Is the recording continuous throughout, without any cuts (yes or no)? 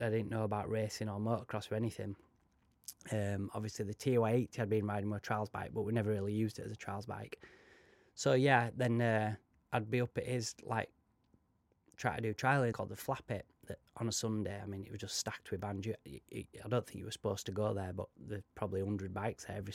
no